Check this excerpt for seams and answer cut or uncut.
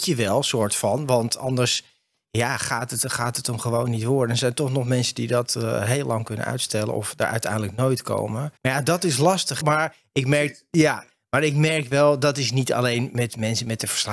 cut